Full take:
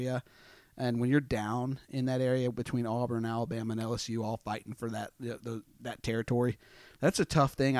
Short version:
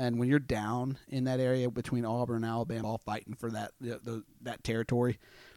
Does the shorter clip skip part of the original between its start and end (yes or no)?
yes